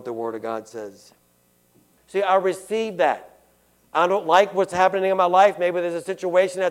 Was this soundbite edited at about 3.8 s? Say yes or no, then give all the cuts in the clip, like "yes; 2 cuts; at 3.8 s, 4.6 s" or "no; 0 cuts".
no; 1 cut; at 2.0 s